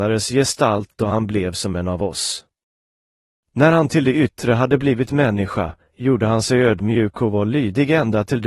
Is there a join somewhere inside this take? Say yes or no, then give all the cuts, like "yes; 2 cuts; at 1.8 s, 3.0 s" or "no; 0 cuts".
no; 0 cuts